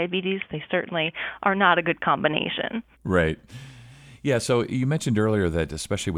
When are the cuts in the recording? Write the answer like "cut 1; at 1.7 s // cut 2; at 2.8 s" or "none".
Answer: cut 1; at 2.9 s

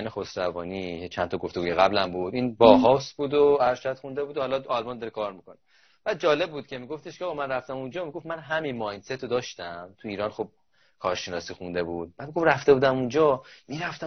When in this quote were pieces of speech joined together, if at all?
none

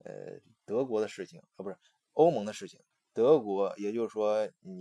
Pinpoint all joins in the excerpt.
cut 1; at 2.9 s

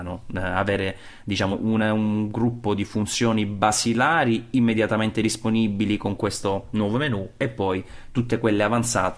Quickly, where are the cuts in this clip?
cut 1; at 1.5 s

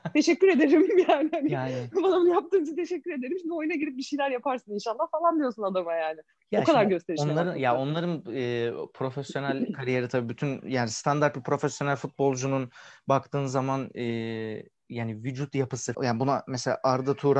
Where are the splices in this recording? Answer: cut 1; at 15.9 s

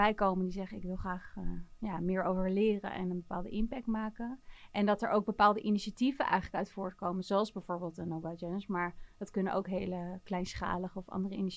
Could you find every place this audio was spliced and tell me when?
none

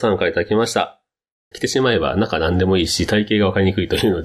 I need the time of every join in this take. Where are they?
cut 1; at 1.5 s

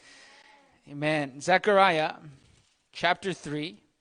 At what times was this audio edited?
none

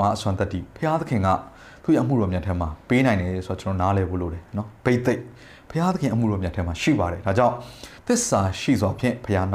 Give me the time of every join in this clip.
cut 1; at 8.0 s

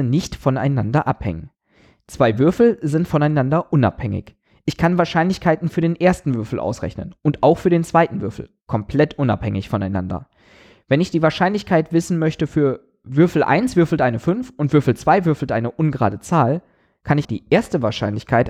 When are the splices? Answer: cut 1; at 17.2 s

